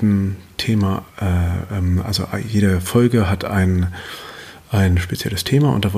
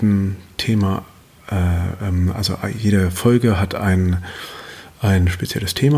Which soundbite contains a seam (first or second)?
first